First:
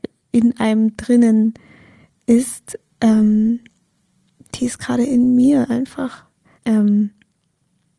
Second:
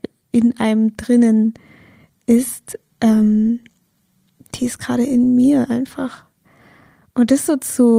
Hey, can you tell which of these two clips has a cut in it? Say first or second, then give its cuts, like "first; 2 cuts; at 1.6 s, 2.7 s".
first; 1 cut; at 6.5 s